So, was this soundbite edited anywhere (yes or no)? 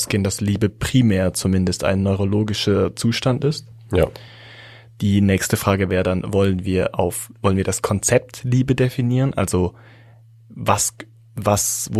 no